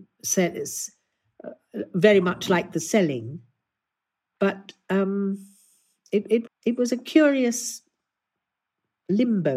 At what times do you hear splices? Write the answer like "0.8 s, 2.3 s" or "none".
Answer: 6.5 s